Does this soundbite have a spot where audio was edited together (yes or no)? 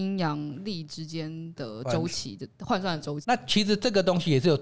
yes